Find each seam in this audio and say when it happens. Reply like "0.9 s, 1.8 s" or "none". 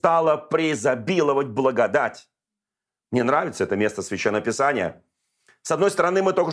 none

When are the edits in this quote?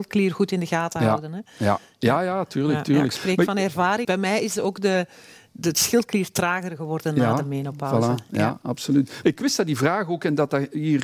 4.0 s, 9.2 s

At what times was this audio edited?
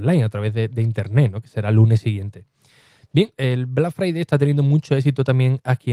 none

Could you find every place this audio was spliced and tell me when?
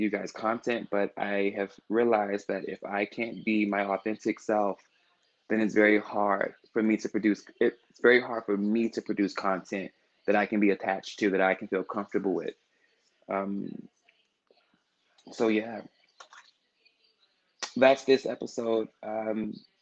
none

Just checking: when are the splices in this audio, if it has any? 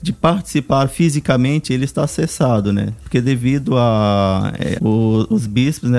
3.0 s, 4.8 s

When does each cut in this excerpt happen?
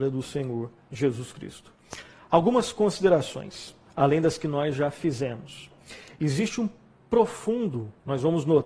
none

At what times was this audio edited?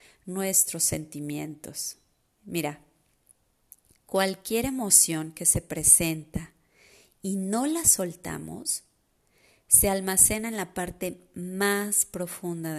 none

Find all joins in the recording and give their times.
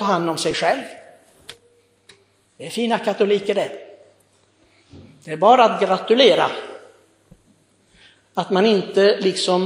none

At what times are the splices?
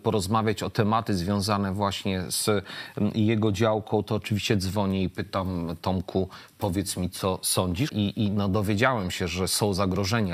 7.9 s

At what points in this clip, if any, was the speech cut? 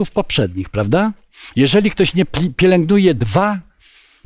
1.5 s

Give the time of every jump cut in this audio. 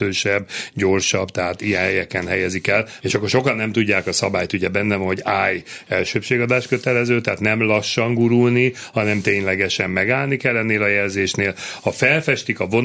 3.0 s

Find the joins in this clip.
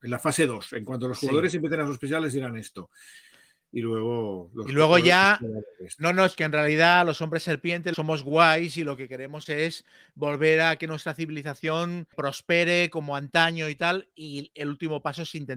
12.1 s

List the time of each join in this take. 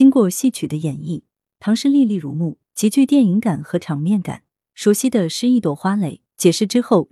none

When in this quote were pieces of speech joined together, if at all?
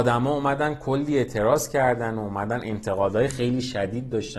3.3 s

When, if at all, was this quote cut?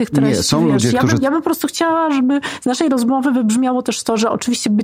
none

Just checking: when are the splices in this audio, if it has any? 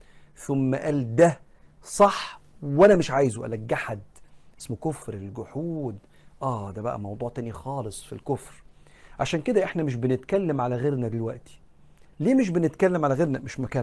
none

